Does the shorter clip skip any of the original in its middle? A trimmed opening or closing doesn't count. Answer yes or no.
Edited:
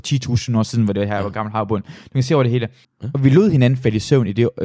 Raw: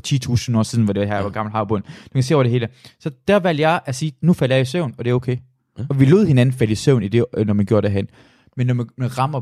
yes